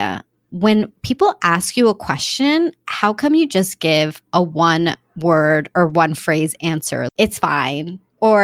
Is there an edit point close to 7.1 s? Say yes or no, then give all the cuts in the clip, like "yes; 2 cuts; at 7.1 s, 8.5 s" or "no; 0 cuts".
yes; 1 cut; at 7.1 s